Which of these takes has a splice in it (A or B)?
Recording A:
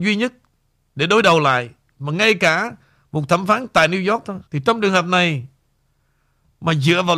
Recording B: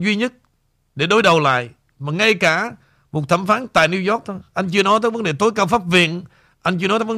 A